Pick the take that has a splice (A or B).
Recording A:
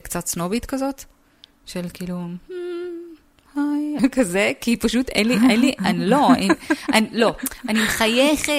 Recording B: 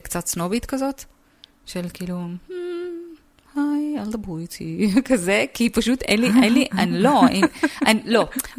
A